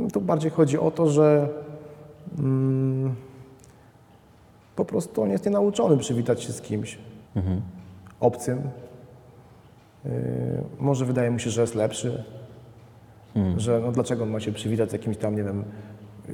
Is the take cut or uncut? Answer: cut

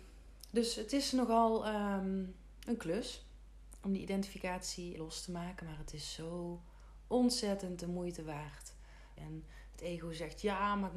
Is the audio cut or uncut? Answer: cut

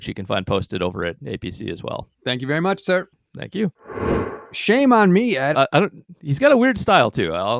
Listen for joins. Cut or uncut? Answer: cut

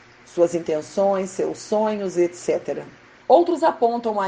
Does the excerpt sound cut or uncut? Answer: cut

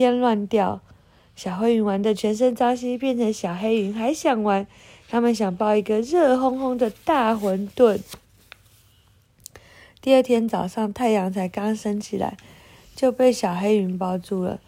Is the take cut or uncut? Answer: uncut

